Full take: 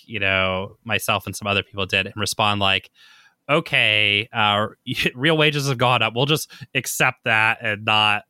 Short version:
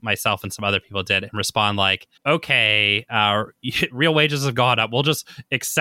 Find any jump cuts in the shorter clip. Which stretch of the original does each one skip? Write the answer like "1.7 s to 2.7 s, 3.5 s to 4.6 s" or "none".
3.0 s to 3.4 s